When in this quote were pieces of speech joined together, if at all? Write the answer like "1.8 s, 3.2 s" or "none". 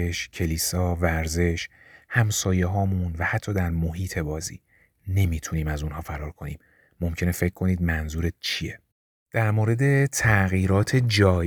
none